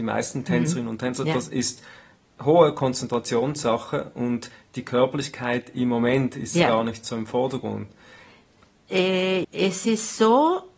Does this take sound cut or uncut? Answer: cut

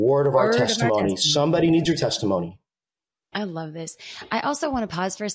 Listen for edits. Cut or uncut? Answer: cut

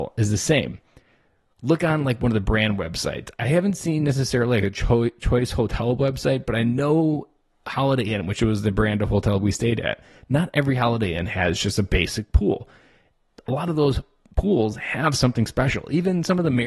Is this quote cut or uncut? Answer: uncut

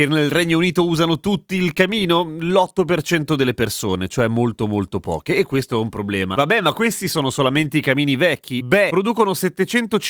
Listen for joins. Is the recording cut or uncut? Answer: cut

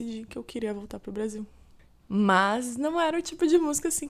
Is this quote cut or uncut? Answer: cut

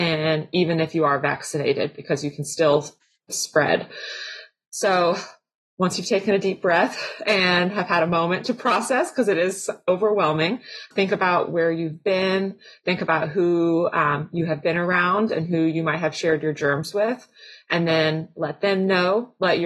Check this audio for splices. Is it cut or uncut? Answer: uncut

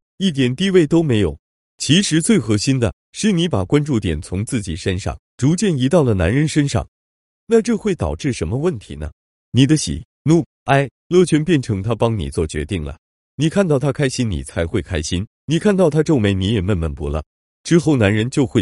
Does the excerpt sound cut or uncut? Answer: uncut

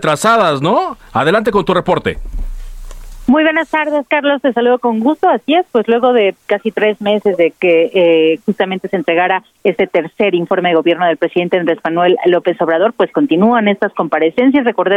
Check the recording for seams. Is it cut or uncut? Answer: uncut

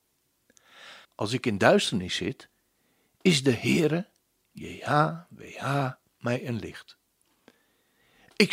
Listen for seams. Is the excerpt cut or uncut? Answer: cut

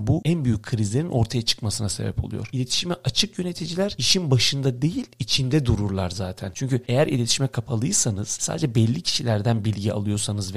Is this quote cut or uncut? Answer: uncut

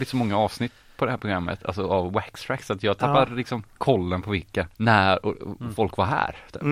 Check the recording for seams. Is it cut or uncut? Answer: cut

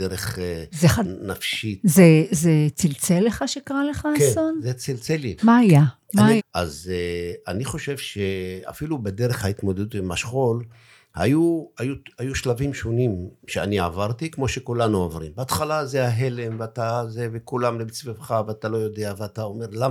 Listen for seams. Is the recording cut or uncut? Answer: cut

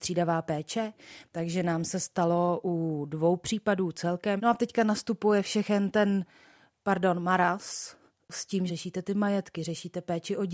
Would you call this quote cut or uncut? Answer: cut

